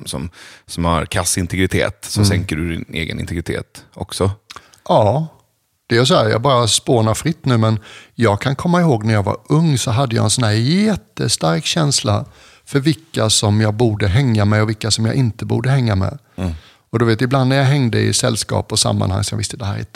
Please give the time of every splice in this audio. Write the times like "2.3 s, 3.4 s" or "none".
none

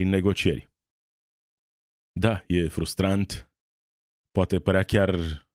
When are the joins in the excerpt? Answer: 4.2 s

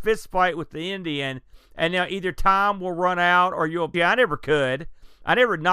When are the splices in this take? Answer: 1.7 s, 3.9 s

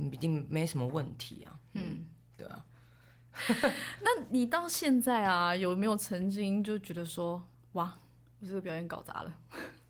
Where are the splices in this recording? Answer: 4.3 s

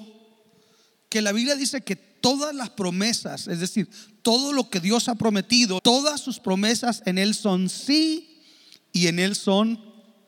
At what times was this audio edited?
5.8 s

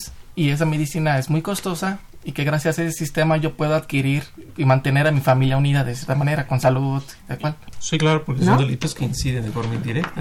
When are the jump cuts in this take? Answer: 4.5 s, 7.7 s

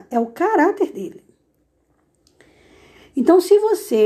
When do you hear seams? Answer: none

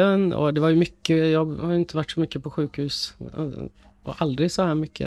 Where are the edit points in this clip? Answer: none

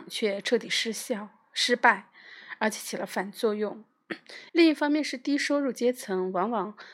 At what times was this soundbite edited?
4.5 s

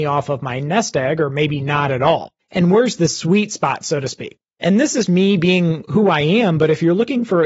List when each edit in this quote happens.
2.4 s, 5.1 s

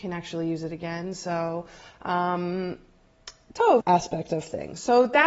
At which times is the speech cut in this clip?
3.8 s

